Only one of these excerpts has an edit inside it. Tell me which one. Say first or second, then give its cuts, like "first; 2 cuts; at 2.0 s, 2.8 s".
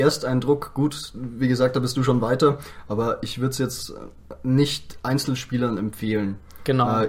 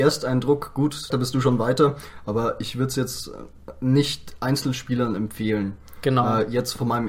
second; 1 cut; at 1.1 s